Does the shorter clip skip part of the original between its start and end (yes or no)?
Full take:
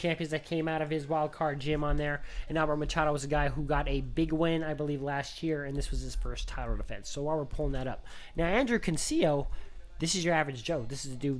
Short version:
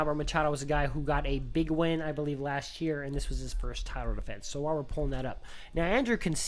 no